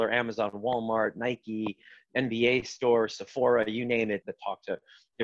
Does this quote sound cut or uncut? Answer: cut